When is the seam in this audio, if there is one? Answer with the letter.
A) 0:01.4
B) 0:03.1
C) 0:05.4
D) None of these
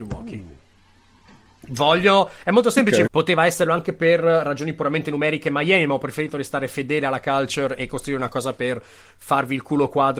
B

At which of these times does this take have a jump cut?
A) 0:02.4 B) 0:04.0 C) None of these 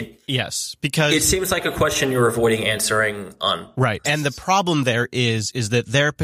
B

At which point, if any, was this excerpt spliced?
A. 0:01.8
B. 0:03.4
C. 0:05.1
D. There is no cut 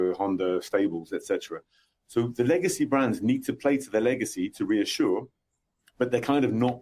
D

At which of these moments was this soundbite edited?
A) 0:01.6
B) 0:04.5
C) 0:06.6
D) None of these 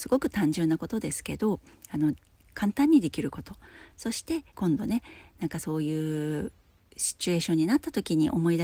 B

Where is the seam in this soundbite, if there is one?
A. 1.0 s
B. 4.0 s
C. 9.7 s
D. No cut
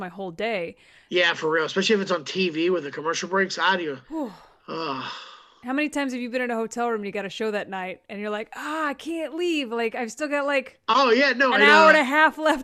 B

